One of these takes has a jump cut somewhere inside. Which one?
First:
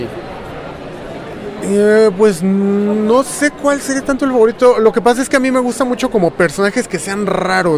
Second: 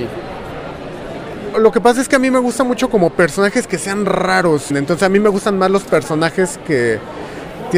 second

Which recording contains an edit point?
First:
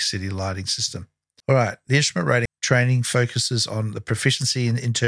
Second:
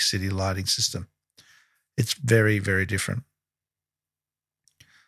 first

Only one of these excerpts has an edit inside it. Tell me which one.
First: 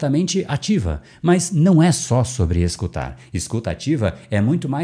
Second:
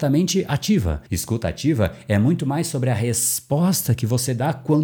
second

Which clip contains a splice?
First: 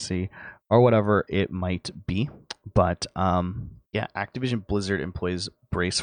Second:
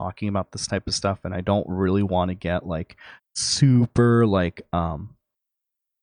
first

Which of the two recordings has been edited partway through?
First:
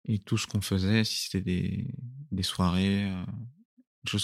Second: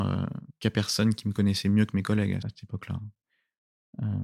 second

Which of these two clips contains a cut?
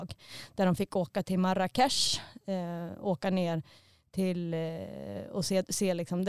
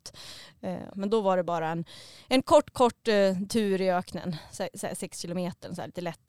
second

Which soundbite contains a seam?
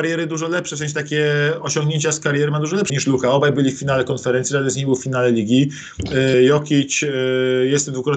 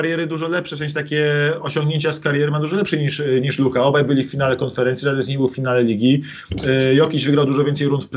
first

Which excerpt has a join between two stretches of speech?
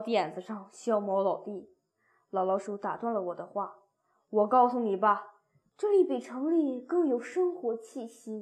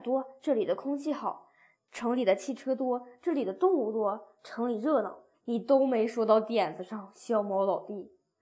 second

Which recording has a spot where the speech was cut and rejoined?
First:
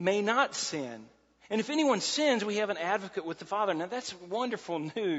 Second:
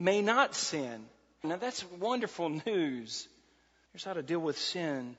second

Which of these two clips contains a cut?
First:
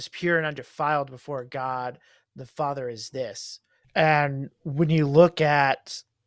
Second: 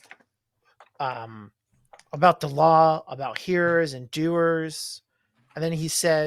first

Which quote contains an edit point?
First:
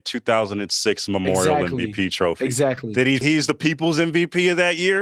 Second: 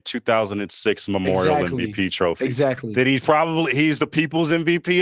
first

